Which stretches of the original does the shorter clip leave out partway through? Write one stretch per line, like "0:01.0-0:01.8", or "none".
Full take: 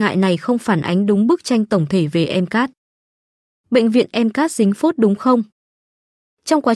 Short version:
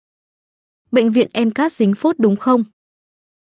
none